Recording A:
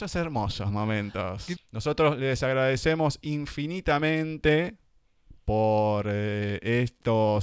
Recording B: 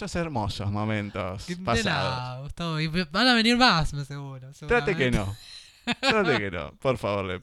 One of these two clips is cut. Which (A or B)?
A